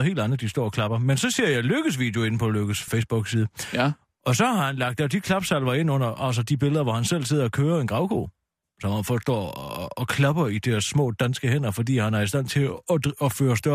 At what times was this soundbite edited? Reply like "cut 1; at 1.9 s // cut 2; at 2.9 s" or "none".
cut 1; at 2.9 s